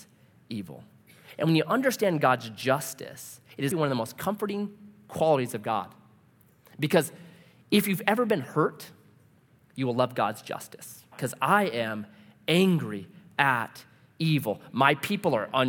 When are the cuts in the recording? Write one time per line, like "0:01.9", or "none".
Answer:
0:03.7
0:11.1